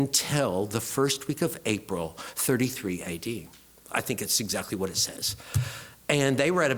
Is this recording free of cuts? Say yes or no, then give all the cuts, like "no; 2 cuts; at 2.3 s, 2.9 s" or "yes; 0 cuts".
yes; 0 cuts